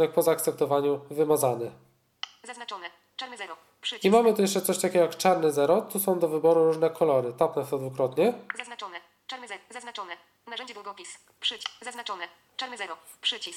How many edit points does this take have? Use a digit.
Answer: 0